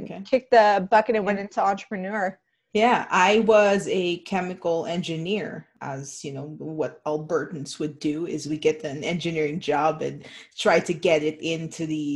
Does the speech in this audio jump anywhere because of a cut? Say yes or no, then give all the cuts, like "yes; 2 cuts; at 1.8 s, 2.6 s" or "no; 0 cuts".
no; 0 cuts